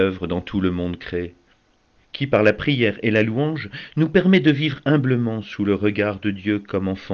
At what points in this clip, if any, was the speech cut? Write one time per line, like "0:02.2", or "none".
0:02.0